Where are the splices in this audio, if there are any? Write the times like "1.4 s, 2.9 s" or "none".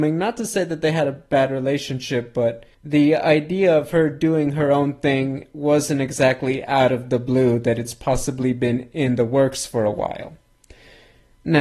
2.7 s